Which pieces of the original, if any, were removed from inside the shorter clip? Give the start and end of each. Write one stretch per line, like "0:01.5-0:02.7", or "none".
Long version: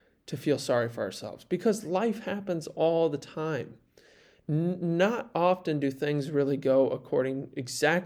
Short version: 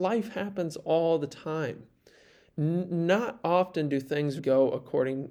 0:06.3-0:06.6